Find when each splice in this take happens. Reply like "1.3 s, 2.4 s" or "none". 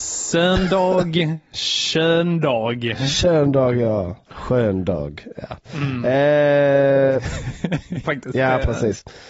4.3 s, 8.0 s